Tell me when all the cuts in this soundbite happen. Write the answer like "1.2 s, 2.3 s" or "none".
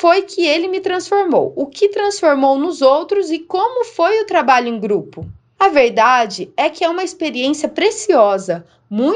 none